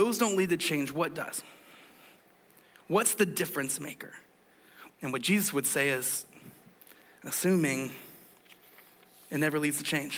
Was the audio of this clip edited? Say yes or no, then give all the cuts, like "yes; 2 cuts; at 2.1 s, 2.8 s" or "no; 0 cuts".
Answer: yes; 1 cut; at 4.9 s